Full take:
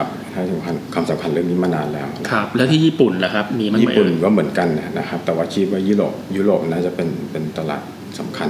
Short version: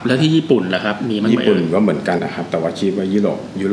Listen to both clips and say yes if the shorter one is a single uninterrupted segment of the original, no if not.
no